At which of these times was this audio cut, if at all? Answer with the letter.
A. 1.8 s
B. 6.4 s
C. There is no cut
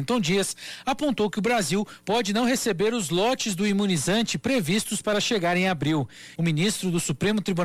B